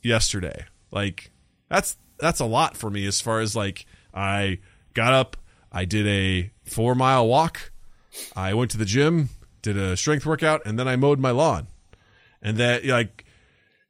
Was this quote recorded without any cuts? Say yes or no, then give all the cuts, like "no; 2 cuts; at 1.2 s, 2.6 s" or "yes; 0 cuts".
no; 1 cut; at 2.2 s